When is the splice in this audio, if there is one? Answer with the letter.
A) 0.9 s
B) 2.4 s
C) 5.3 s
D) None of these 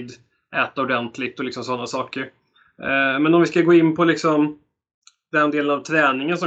D